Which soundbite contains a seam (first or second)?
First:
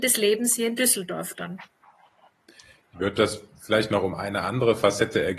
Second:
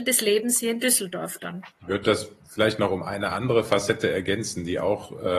second